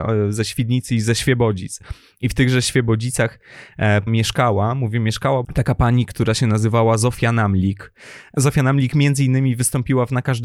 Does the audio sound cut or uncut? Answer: cut